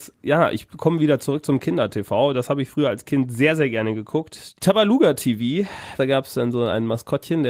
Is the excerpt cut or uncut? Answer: cut